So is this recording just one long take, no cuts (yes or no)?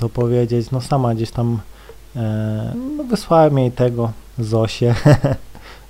no